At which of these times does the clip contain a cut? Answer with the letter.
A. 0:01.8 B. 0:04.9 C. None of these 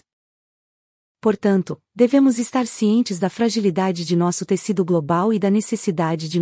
A